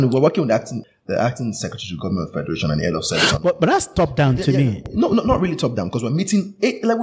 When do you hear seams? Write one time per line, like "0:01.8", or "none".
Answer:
none